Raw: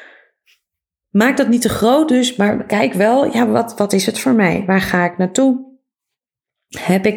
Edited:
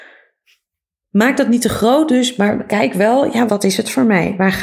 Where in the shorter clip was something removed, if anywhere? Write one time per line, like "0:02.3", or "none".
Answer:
0:03.5